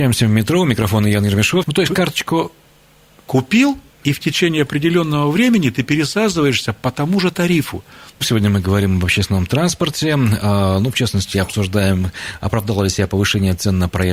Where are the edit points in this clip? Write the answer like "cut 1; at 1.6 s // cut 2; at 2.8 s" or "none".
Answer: cut 1; at 1.6 s // cut 2; at 8.2 s